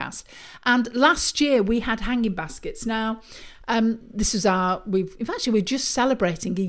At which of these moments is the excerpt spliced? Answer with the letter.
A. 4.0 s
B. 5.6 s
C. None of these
C